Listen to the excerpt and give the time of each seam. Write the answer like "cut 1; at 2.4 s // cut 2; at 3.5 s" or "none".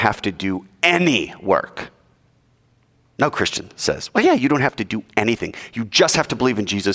none